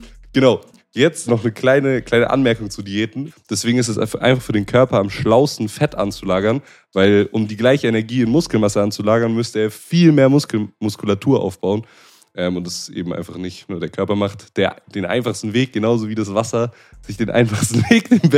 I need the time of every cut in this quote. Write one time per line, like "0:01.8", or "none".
0:01.3
0:03.3